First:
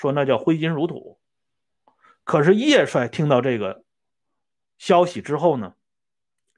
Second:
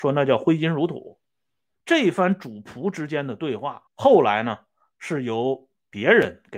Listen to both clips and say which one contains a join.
second; 2 cuts; at 1.7 s, 3.9 s

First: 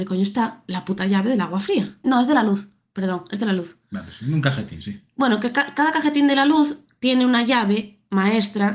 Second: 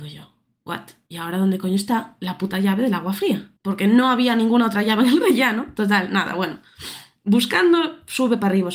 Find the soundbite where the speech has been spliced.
first; 1 cut; at 2.0 s

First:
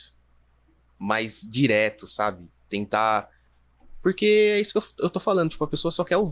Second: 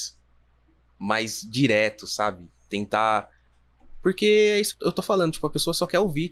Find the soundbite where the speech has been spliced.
second; 1 cut; at 4.7 s

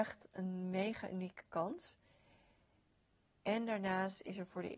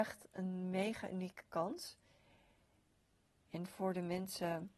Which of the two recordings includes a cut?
second; 1 cut; at 3.4 s

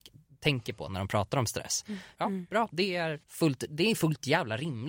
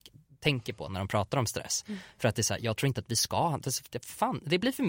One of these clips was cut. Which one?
first; 2 cuts; at 2.1 s, 3.2 s

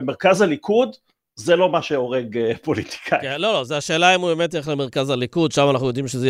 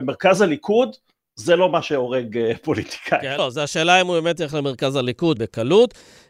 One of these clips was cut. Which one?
second; 2 cuts; at 3.4 s, 5.4 s

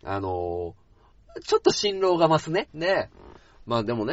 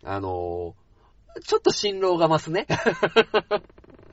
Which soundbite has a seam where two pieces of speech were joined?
first; 1 cut; at 2.7 s

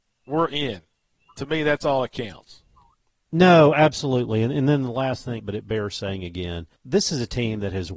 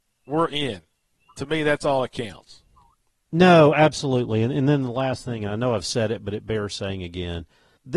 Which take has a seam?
first; 2 cuts; at 5.4 s, 6.7 s

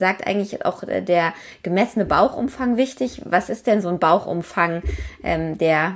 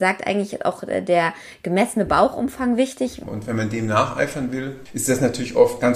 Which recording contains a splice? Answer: second; 2 cuts; at 3.2 s, 4.9 s

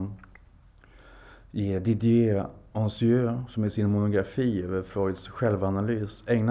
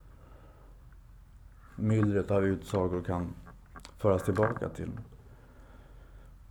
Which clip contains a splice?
second; 1 cut; at 1.7 s

